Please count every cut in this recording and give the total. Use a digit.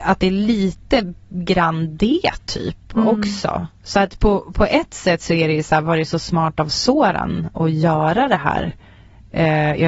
0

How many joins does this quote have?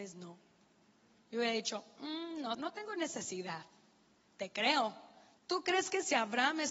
2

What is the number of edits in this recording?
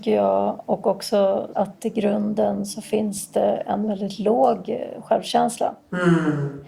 1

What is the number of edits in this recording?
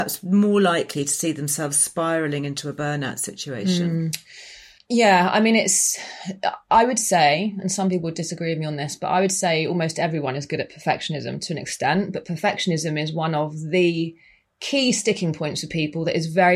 0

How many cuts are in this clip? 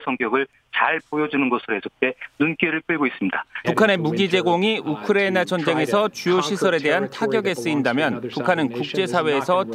1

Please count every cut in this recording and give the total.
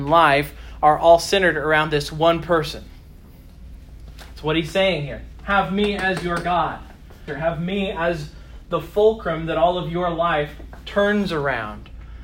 1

